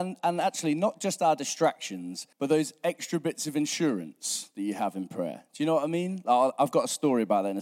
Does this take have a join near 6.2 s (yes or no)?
no